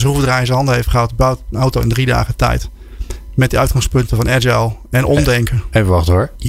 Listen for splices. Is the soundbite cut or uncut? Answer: uncut